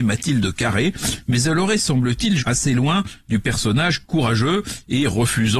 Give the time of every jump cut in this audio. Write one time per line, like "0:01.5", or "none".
0:02.4